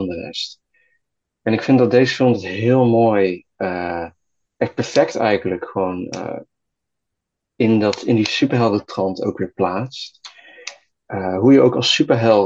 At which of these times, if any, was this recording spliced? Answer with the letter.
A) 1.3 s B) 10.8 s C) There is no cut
C